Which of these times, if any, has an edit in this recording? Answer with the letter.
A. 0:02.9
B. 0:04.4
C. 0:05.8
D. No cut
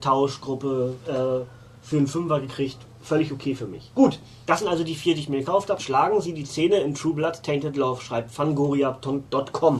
C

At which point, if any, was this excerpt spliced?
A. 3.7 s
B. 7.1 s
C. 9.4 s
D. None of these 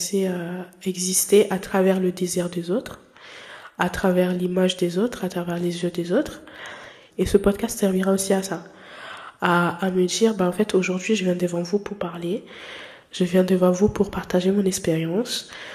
B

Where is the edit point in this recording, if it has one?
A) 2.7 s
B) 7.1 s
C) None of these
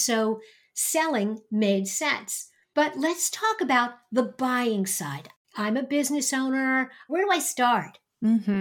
B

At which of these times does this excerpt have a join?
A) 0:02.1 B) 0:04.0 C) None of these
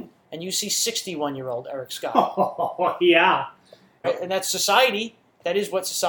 B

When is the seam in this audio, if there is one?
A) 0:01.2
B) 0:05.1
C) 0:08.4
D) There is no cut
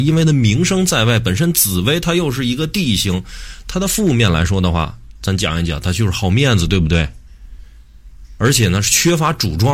D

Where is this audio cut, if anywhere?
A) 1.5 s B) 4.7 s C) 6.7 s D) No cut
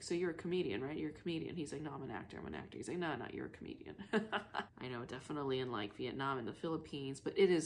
B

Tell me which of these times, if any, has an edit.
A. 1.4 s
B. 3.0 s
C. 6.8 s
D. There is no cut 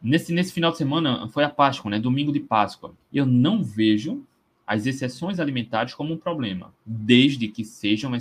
B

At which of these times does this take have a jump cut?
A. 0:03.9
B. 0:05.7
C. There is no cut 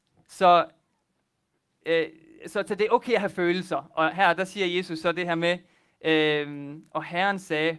C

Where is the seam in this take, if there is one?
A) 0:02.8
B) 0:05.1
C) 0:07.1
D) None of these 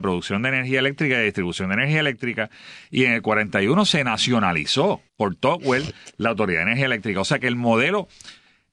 B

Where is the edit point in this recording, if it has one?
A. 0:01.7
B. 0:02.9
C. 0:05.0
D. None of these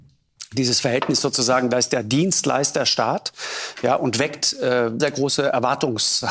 C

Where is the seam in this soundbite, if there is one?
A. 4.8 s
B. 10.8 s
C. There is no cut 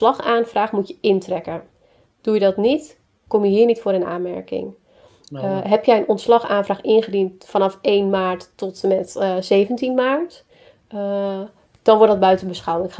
C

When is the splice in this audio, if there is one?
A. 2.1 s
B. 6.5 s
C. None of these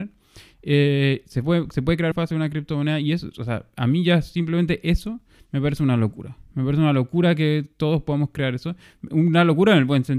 A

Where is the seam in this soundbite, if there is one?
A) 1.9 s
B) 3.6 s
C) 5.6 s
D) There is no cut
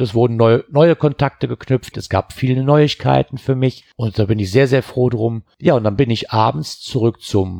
A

